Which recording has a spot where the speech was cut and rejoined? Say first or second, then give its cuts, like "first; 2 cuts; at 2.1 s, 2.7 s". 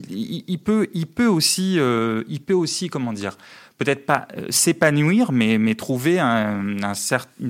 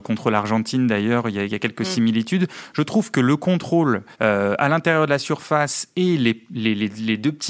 second; 1 cut; at 4.1 s